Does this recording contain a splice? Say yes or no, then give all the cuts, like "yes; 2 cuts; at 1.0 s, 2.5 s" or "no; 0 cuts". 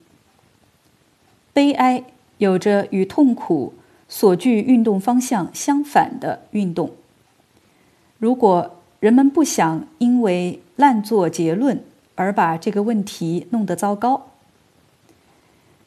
no; 0 cuts